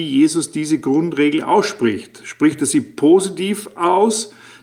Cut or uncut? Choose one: uncut